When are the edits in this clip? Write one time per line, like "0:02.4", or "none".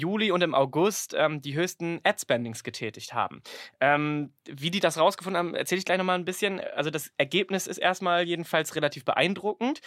none